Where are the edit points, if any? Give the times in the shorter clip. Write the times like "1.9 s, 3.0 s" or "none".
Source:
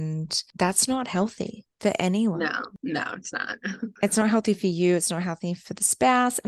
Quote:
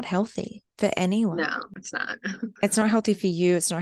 1.8 s